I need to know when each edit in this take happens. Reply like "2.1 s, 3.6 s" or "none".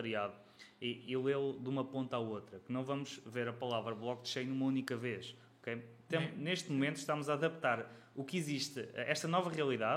none